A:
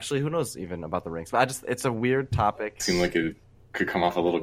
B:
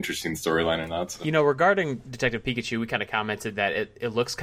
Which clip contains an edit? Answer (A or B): A